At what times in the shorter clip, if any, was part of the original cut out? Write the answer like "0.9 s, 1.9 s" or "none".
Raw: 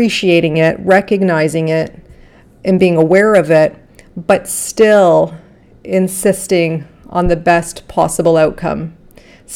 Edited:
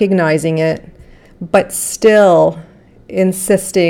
1.3 s